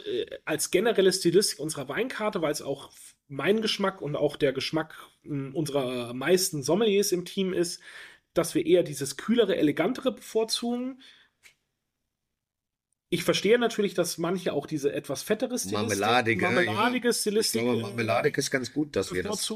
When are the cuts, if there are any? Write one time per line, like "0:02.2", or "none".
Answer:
none